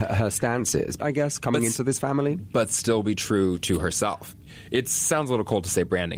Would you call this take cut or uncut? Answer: cut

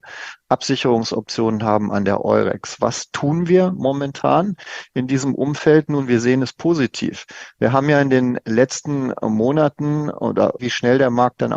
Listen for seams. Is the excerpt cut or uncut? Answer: cut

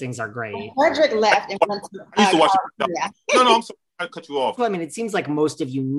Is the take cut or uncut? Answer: cut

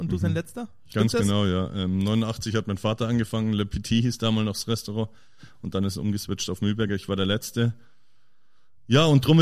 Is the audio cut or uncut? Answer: uncut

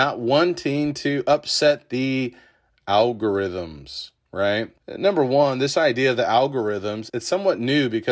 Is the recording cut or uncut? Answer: cut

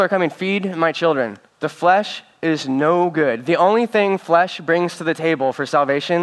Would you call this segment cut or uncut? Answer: cut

